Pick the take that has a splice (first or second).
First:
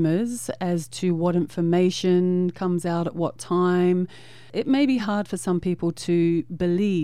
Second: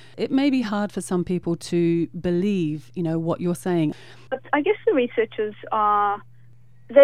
second